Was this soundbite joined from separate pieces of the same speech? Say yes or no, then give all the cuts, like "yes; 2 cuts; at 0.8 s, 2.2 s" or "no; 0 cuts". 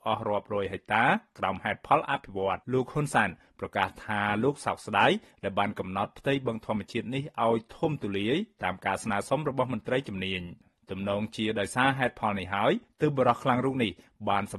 yes; 1 cut; at 2.6 s